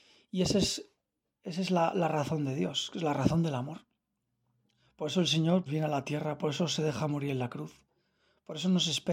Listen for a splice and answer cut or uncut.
cut